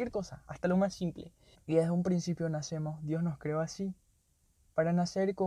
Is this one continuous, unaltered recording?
no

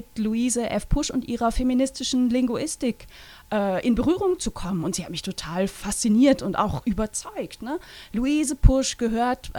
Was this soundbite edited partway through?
no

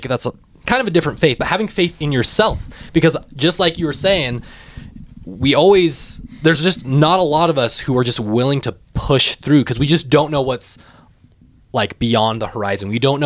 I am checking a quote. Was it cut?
yes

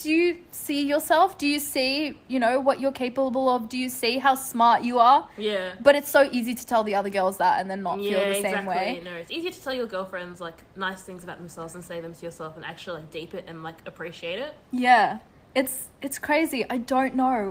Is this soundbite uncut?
yes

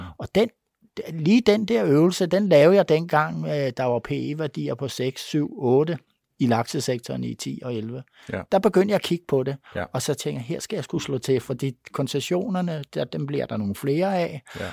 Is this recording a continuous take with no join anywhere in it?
yes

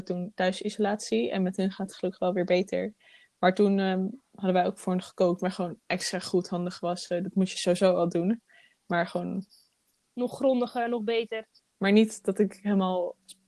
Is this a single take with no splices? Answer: no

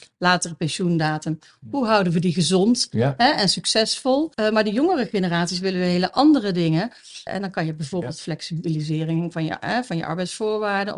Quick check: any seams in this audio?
yes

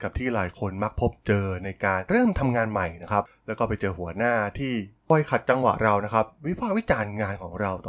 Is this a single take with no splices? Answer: no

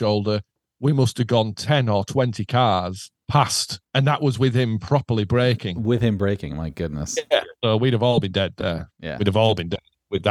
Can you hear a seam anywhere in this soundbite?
yes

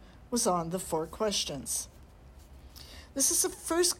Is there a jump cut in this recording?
no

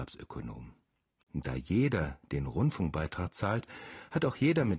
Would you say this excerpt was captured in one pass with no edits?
no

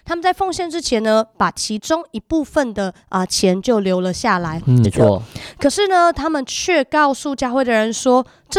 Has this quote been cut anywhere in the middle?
yes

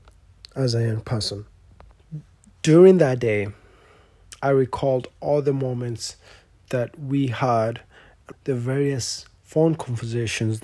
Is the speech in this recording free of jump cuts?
no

